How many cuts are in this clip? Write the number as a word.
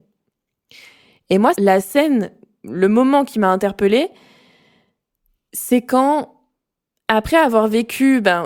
one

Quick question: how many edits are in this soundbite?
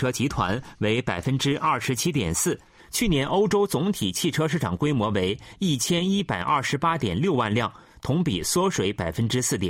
one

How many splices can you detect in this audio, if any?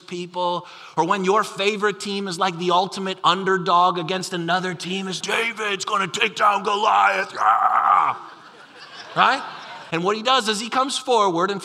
two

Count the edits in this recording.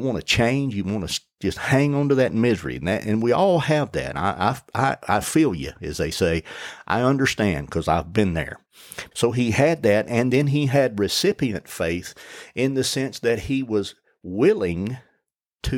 one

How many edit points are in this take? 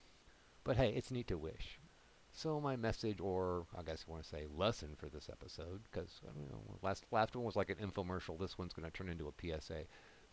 zero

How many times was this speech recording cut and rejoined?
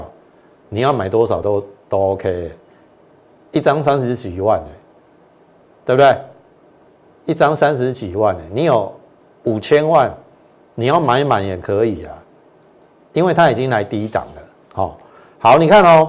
zero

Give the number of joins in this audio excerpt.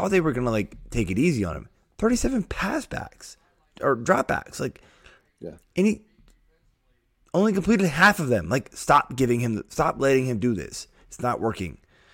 zero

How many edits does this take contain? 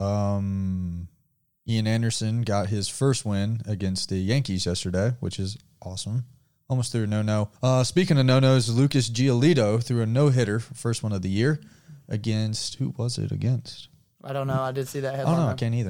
one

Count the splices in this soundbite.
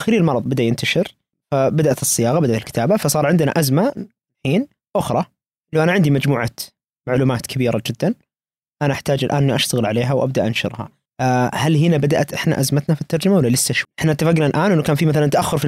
one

